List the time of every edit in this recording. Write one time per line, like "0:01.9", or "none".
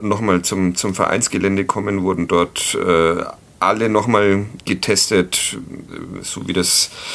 0:04.6